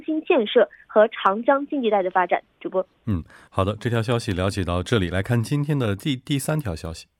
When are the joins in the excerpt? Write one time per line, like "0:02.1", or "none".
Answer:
none